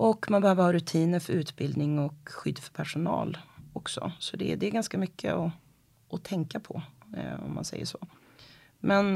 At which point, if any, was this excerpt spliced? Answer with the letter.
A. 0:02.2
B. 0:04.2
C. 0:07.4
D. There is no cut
D